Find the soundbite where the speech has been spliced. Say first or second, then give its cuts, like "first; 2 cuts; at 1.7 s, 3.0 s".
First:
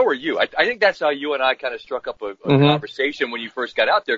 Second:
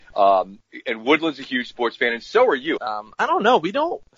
second; 1 cut; at 2.8 s